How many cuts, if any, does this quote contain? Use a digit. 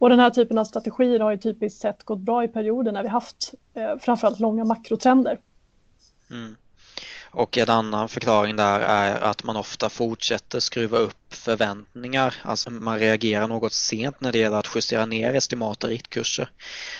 1